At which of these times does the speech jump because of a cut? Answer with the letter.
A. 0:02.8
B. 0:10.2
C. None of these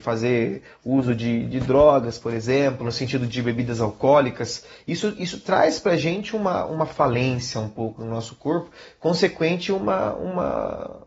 A